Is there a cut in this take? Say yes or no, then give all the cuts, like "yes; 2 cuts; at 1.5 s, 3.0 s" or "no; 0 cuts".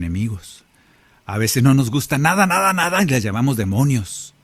no; 0 cuts